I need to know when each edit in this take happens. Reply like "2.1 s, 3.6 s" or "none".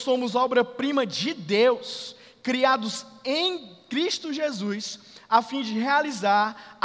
none